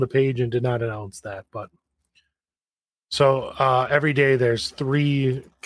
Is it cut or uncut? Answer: uncut